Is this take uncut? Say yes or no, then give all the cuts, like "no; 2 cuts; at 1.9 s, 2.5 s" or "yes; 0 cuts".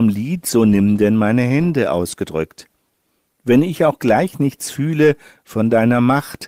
yes; 0 cuts